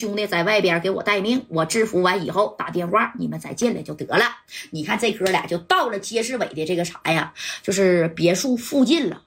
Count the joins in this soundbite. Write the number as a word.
zero